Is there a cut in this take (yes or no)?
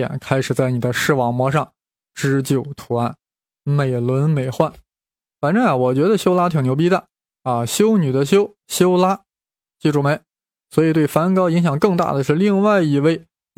yes